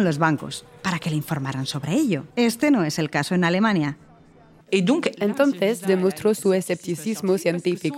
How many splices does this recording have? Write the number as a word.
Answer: two